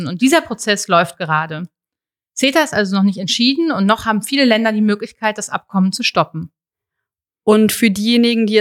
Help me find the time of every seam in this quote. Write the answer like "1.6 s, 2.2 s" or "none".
none